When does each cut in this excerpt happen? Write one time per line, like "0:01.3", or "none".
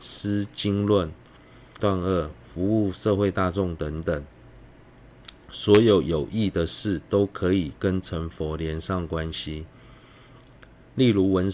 0:01.8